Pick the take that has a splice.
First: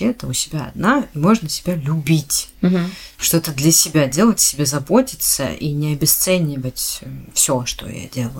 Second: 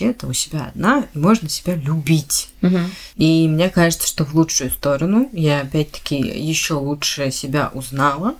second; 1 cut; at 3.1 s

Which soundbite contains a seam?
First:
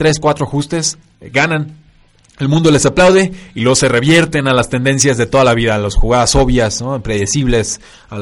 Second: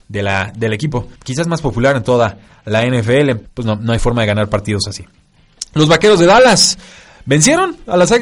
second; 2 cuts; at 1.2 s, 3.5 s

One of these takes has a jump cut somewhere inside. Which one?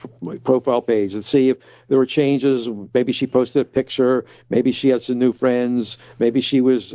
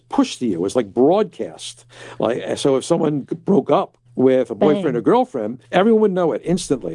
second; 2 cuts; at 4.1 s, 5.6 s

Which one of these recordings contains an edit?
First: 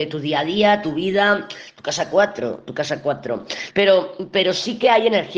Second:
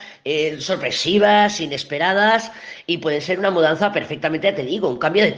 first; 1 cut; at 3.7 s

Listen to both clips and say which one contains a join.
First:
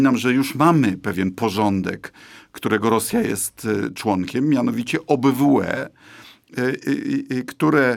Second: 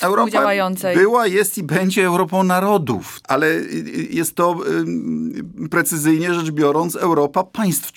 second; 1 cut; at 3.2 s

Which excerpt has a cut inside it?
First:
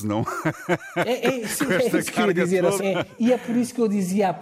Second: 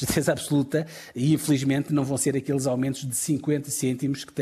first; 1 cut; at 2.8 s

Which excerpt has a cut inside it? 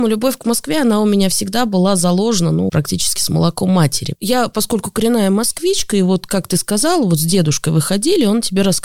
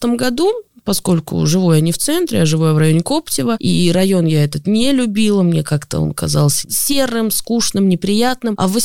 first; 2 cuts; at 2.7 s, 4.1 s

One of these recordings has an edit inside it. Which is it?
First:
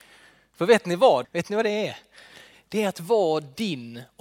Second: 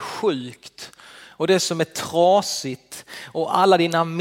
first; 1 cut; at 1.2 s

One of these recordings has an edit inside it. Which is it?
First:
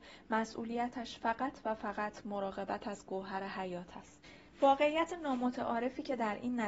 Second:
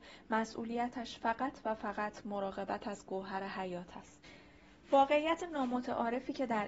first; 1 cut; at 4.5 s

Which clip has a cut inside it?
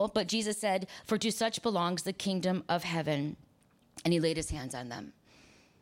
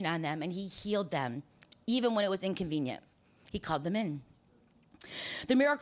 first; 1 cut; at 1.0 s

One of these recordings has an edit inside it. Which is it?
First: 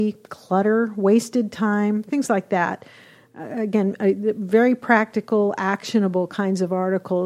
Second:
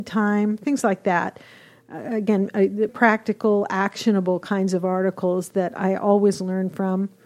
second; 1 cut; at 2.9 s

